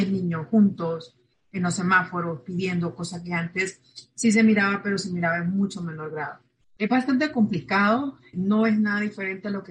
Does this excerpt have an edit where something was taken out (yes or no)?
yes